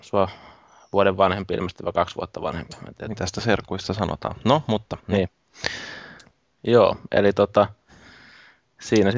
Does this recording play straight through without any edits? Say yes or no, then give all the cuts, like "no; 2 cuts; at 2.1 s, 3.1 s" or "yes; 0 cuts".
yes; 0 cuts